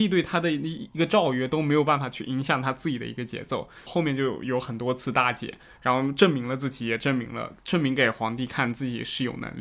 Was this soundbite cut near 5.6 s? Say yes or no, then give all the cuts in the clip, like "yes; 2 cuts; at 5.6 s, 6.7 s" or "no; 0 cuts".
no; 1 cut; at 3.9 s